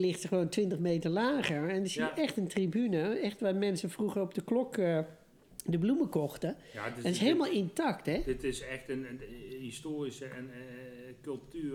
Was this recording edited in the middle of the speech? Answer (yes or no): no